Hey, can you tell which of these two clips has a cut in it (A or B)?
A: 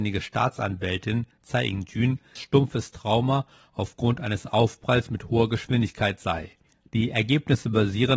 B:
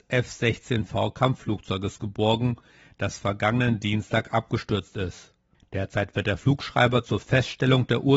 A